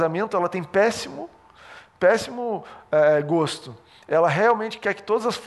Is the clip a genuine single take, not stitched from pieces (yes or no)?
yes